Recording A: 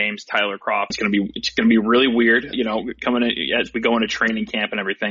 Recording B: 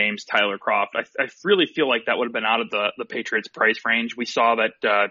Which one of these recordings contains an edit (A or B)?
A